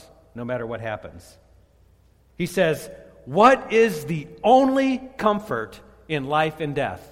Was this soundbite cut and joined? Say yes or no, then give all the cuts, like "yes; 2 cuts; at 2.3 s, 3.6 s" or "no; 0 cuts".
yes; 1 cut; at 2.3 s